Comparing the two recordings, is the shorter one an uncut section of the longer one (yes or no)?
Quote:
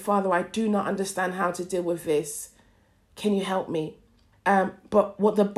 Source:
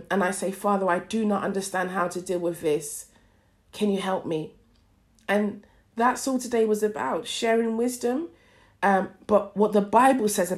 no